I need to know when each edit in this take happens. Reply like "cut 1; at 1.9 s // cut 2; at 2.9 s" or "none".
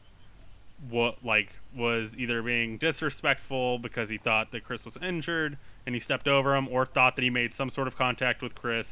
none